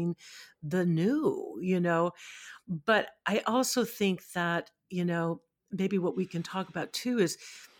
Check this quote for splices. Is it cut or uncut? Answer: uncut